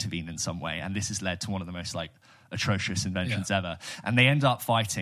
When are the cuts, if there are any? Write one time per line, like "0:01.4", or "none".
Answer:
none